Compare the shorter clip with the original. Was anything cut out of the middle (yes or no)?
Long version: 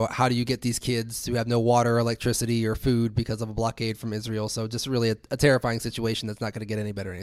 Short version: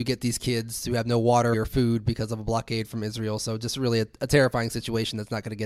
yes